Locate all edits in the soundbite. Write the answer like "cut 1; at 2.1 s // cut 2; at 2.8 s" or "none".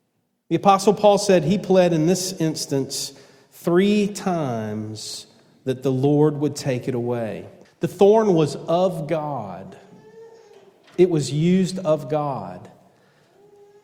cut 1; at 7.7 s